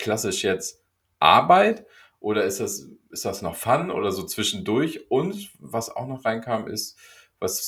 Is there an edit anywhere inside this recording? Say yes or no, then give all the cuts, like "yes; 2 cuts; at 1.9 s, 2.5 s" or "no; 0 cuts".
no; 0 cuts